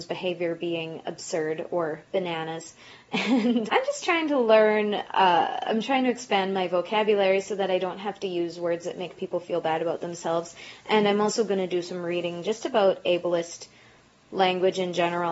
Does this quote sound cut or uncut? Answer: cut